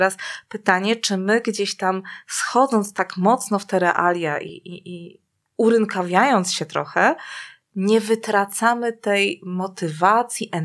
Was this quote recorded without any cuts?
yes; 0 cuts

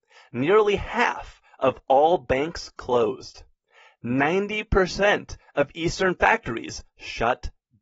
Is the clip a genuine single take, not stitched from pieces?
yes; 0 cuts

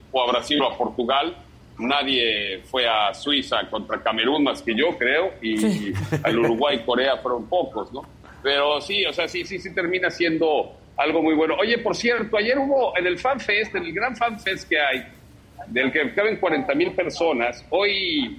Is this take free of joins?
yes; 0 cuts

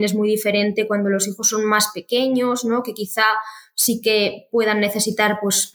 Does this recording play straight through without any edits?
yes; 0 cuts

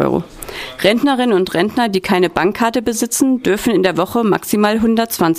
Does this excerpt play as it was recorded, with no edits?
yes; 0 cuts

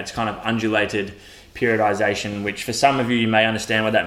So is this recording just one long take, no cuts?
yes; 0 cuts

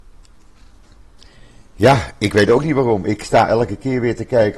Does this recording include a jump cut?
no; 0 cuts

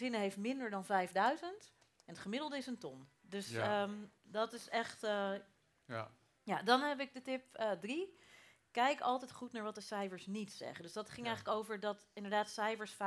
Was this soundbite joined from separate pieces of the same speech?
yes; 1 cut; at 3.2 s

